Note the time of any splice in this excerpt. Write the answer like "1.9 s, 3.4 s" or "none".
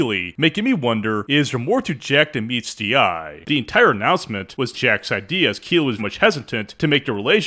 3.4 s, 4.7 s, 6.0 s